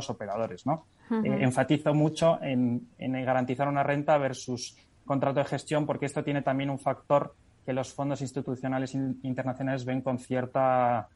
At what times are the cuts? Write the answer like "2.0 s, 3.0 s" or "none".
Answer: none